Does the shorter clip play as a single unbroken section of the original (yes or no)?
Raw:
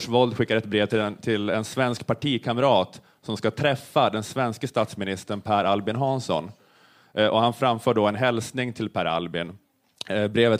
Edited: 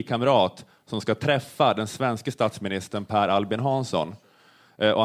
yes